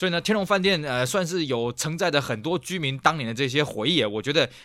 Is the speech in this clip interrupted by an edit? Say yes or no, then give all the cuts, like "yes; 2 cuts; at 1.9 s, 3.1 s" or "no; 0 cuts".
no; 0 cuts